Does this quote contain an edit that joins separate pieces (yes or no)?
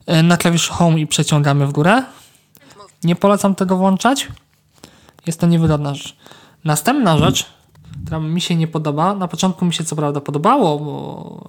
yes